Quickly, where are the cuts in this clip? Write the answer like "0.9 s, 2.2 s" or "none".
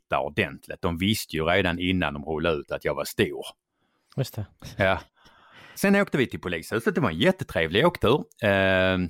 5.7 s